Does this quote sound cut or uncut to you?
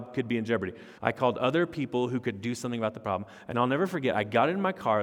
cut